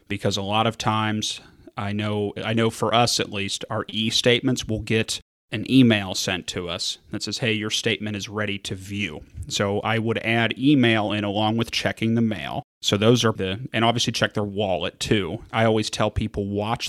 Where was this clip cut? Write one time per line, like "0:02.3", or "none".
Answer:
0:13.4
0:15.5